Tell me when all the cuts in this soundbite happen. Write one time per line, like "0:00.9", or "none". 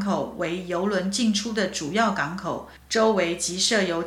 0:02.8